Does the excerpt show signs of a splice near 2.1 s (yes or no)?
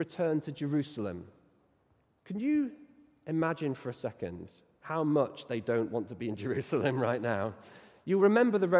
yes